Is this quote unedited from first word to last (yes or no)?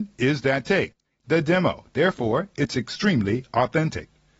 yes